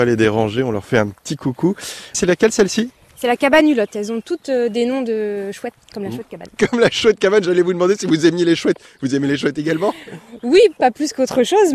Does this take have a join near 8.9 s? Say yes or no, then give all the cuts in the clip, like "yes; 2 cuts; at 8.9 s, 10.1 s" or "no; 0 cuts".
no; 2 cuts; at 2.1 s, 10.8 s